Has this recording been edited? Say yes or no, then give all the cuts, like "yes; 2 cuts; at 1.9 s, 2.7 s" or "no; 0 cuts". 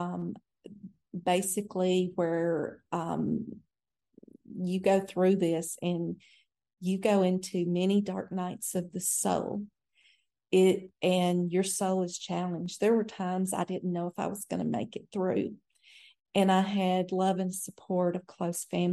no; 0 cuts